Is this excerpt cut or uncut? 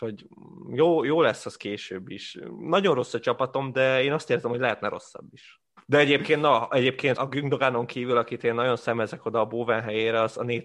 cut